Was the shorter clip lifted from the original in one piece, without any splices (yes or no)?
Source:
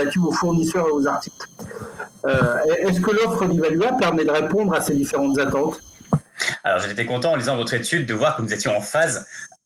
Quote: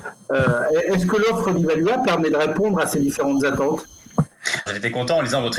no